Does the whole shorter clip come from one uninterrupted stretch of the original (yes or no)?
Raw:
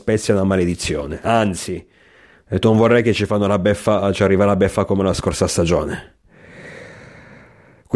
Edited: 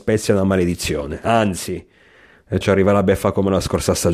no